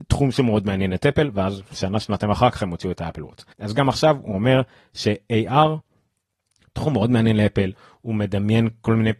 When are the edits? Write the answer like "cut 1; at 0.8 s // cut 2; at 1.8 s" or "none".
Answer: cut 1; at 3.5 s